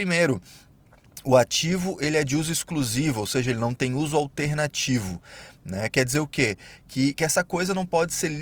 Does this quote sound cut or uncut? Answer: uncut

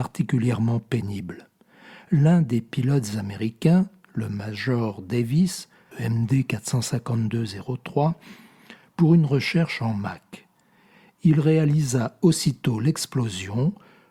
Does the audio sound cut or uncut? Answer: cut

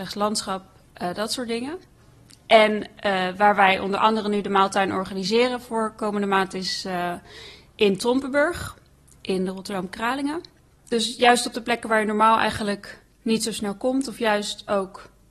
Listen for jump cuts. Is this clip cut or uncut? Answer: uncut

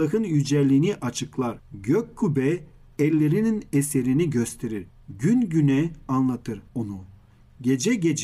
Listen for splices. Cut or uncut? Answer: uncut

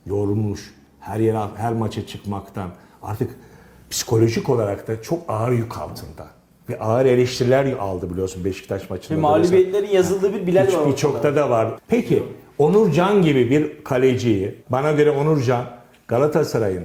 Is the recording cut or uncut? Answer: cut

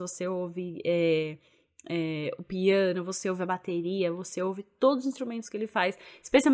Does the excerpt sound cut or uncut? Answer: uncut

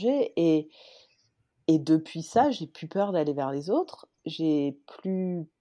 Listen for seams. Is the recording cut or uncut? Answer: uncut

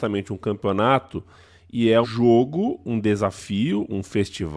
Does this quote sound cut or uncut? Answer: cut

